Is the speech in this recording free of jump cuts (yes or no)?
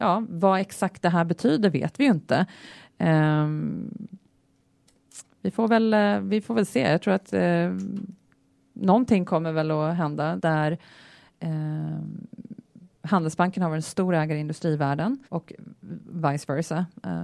no